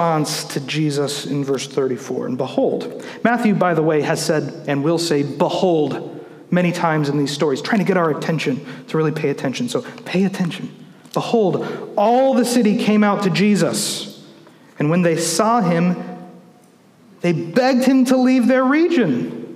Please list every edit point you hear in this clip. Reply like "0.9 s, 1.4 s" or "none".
none